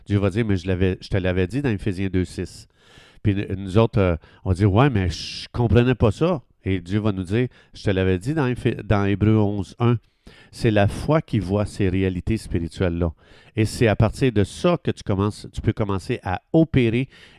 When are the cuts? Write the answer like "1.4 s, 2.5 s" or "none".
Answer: none

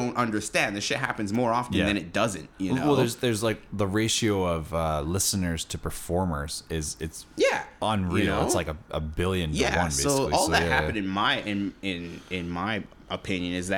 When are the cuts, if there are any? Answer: none

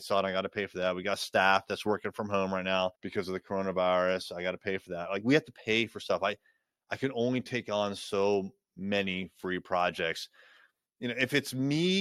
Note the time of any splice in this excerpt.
3.0 s

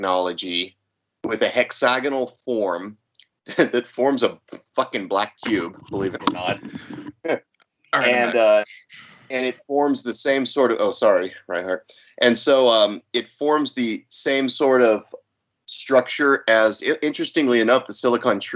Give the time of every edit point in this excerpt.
none

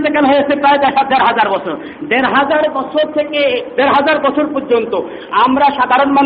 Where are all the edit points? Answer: none

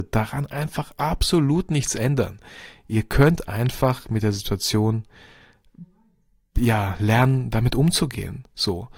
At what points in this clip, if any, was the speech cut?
none

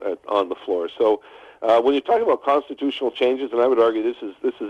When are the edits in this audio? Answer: none

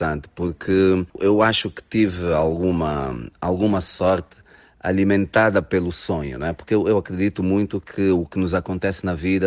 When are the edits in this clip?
none

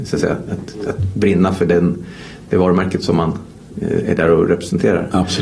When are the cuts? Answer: none

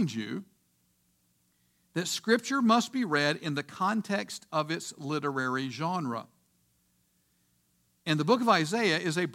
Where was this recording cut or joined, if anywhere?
none

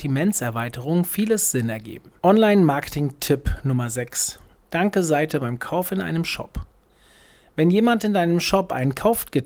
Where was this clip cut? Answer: 2.2 s

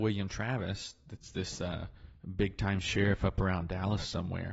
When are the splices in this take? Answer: none

